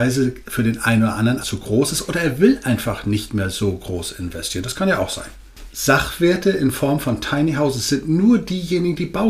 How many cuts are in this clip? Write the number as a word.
two